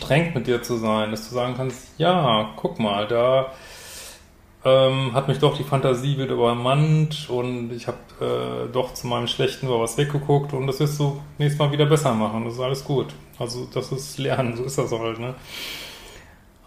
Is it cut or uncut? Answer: uncut